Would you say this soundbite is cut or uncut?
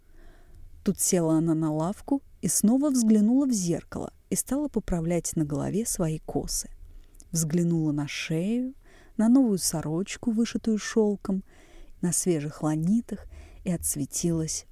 cut